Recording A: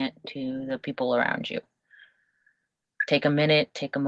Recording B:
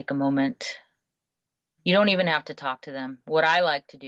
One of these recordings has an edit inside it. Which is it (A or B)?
B